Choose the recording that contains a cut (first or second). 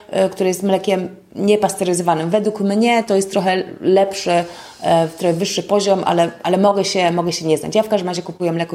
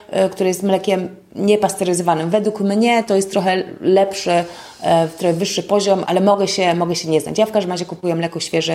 second